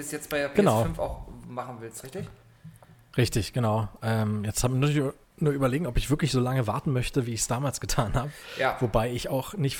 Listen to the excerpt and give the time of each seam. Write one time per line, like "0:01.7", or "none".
none